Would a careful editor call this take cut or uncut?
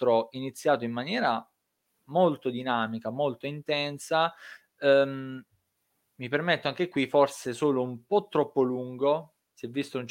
uncut